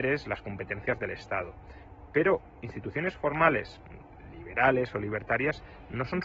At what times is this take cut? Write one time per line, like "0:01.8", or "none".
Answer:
none

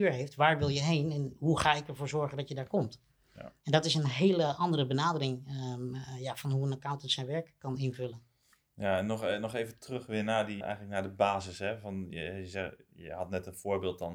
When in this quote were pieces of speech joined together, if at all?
0:10.6

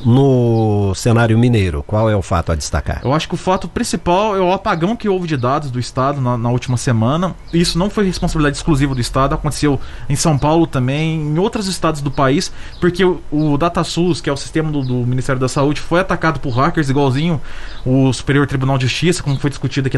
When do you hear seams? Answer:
none

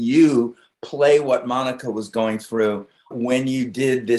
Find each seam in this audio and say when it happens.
0:03.1

